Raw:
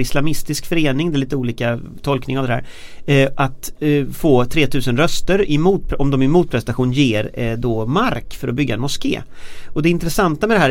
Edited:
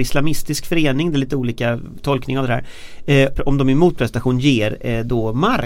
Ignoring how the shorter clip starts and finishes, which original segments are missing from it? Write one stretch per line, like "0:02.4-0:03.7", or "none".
0:03.3-0:05.9